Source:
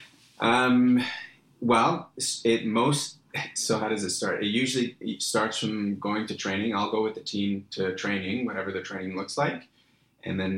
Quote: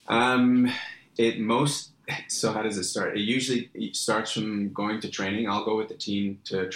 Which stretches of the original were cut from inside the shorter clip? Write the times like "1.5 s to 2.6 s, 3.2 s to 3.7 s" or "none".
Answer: 1.5 s to 2.4 s